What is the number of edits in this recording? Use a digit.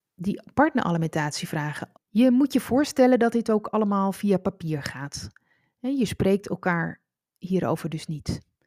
1